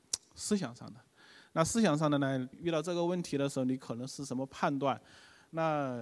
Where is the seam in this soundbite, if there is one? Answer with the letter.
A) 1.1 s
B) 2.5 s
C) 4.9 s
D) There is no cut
B